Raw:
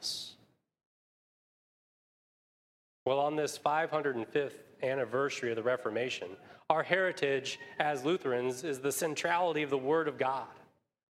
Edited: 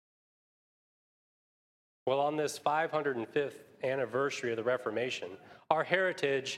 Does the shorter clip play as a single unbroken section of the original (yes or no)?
yes